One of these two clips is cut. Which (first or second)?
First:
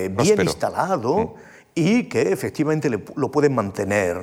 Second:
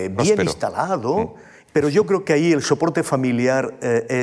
second